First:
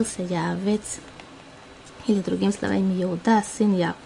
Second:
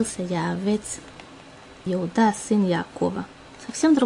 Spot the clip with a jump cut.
second; 1 cut; at 1.9 s

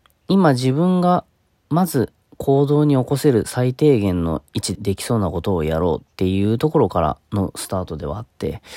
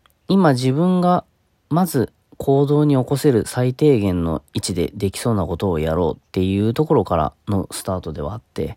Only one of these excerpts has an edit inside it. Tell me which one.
first; 1 cut; at 4.8 s

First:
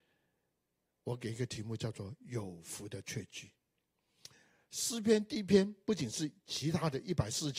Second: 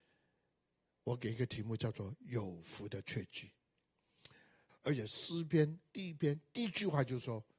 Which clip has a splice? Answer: second; 1 cut; at 4.7 s

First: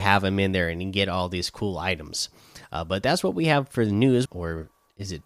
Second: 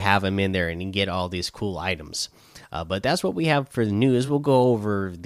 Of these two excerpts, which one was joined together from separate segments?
first; 1 cut; at 4.3 s

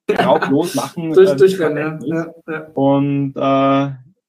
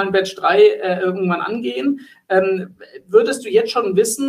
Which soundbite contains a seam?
first; 1 cut; at 2.4 s

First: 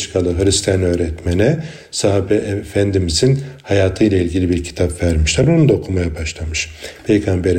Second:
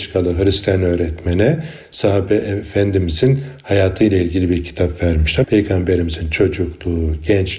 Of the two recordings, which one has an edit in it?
second; 1 cut; at 5.4 s

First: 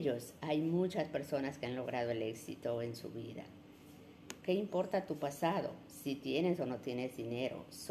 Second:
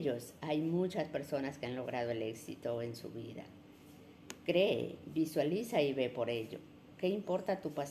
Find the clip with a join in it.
first; 1 cut; at 4.4 s

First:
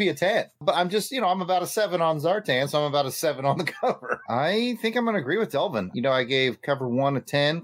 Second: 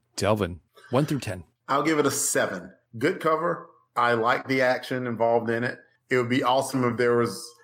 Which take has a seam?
first; 2 cuts; at 4.2 s, 5.9 s

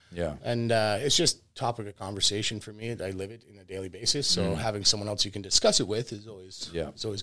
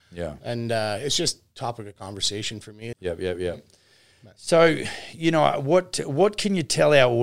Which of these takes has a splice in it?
second; 1 cut; at 2.9 s

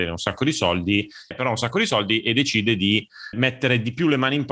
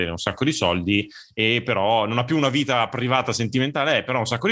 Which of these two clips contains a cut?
first; 2 cuts; at 1.3 s, 3.3 s

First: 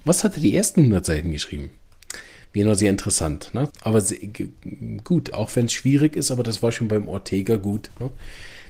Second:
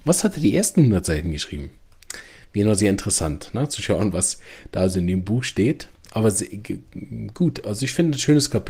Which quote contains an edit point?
first; 2 cuts; at 3.7 s, 5.3 s

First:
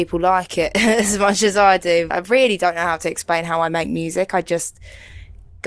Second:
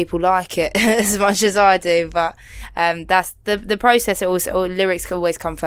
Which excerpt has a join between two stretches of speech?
first; 1 cut; at 2.1 s

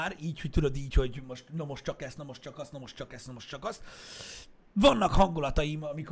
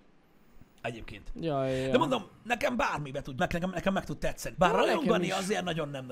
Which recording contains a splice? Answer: second; 2 cuts; at 3.4 s, 4.5 s

